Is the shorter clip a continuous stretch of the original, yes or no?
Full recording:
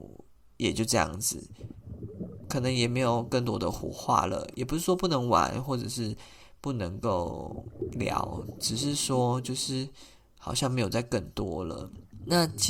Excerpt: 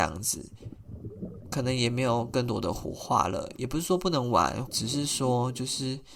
no